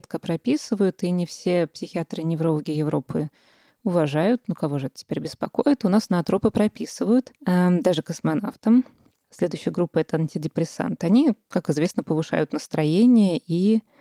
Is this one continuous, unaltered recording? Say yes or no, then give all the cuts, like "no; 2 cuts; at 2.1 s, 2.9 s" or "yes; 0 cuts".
no; 2 cuts; at 7.4 s, 9.2 s